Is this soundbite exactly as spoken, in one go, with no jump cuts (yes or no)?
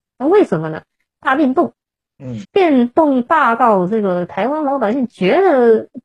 no